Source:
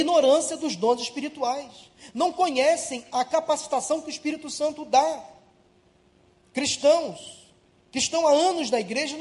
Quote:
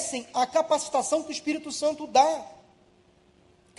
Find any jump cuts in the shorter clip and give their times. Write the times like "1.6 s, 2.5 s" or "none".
none